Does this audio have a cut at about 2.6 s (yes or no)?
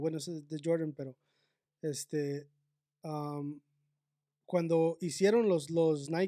no